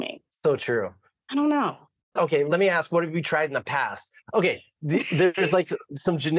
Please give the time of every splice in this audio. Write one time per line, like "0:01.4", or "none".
0:04.2